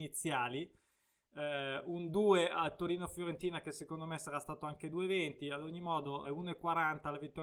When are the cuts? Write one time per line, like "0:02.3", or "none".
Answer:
0:01.2
0:06.2